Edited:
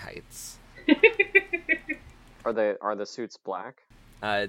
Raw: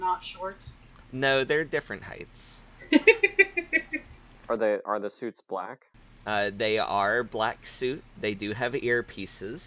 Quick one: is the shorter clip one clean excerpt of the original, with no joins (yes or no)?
yes